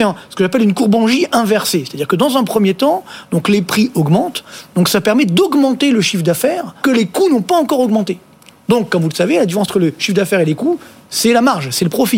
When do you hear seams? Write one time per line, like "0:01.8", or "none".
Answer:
0:06.8